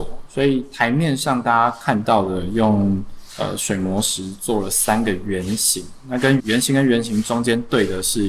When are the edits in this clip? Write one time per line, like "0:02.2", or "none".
0:06.4

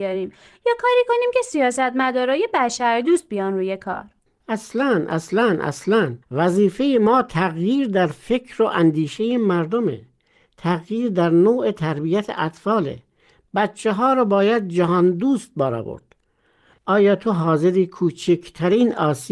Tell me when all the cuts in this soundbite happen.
0:06.2

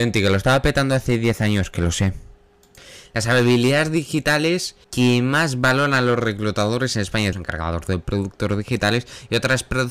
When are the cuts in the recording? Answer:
0:04.8
0:07.3

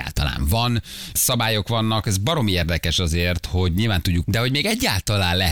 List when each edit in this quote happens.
0:01.2
0:04.2

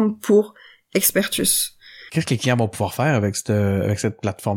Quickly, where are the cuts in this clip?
0:02.1

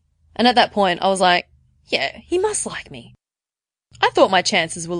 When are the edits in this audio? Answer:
none

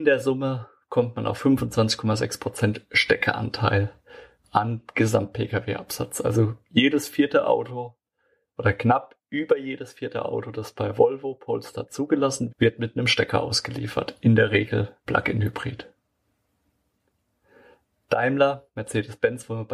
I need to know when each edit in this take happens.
0:12.5

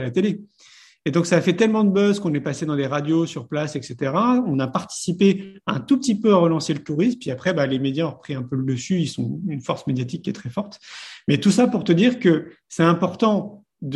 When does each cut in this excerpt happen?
none

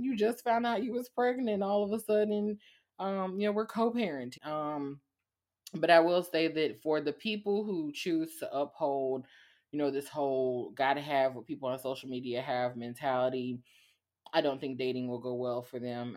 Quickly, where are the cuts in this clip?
0:04.4

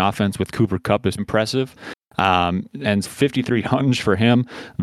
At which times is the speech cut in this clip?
0:01.2
0:03.0

